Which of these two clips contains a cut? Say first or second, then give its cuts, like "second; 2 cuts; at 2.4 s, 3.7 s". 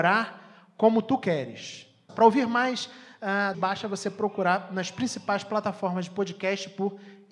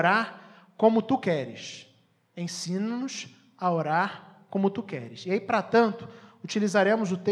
first; 2 cuts; at 2.1 s, 3.5 s